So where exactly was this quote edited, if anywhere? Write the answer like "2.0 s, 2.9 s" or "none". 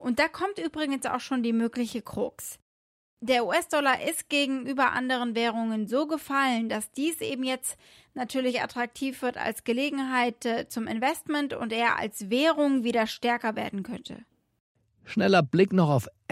none